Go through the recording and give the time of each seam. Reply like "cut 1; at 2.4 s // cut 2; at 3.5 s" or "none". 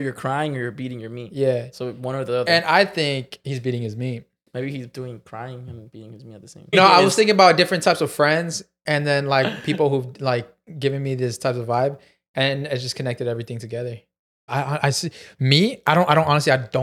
cut 1; at 6.7 s // cut 2; at 14.5 s